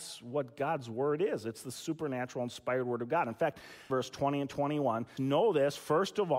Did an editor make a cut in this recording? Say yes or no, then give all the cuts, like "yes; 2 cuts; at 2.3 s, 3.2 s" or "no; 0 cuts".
yes; 2 cuts; at 3.9 s, 5.2 s